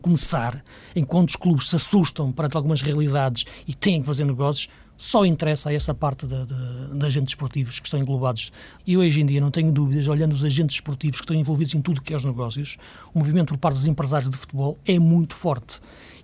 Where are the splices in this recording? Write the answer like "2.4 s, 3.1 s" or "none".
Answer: 8.8 s